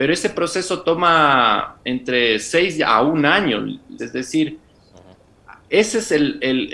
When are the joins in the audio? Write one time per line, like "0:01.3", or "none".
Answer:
0:04.0